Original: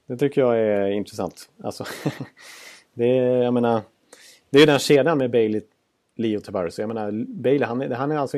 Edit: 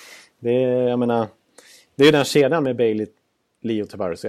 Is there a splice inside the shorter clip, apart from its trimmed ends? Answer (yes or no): no